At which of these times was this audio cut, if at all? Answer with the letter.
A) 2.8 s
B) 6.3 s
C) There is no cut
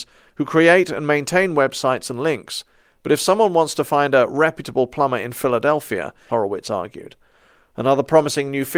B